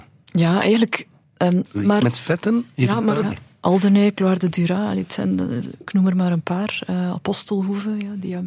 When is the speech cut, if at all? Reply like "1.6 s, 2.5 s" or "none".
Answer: 1.7 s, 3.2 s